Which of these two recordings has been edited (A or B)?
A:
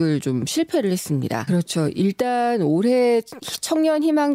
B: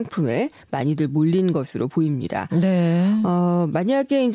A